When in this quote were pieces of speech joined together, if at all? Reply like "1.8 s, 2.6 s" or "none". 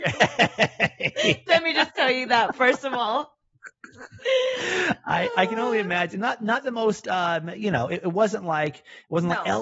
none